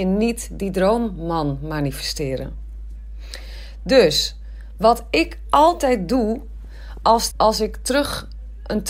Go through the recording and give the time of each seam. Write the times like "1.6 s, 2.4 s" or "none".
7.3 s